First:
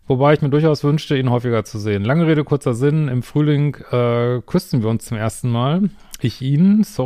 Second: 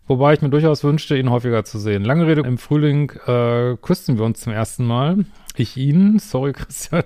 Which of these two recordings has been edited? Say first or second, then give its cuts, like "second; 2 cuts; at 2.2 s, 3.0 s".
second; 1 cut; at 2.4 s